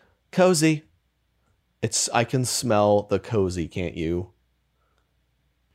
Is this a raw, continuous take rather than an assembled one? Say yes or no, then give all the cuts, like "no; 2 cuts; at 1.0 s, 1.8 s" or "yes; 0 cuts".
yes; 0 cuts